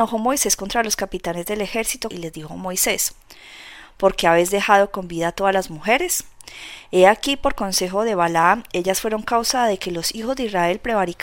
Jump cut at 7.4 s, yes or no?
no